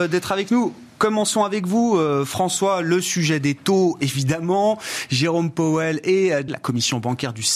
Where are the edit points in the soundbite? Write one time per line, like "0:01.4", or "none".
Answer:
0:06.5